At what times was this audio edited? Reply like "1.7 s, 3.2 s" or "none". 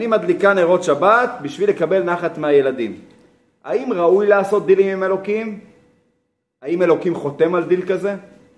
none

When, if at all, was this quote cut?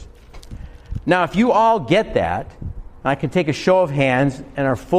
none

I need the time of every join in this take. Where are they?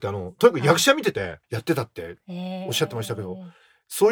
1.4 s

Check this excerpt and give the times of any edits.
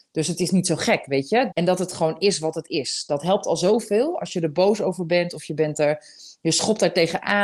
1.5 s

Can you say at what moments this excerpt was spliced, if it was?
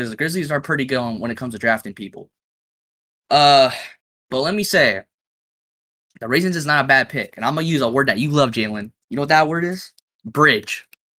10.1 s

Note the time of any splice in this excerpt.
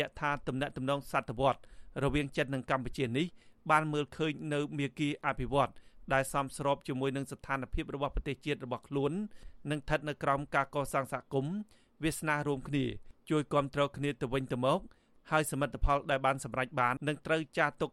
17.0 s

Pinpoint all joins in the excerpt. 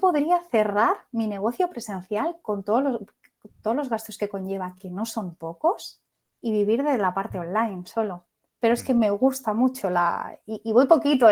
none

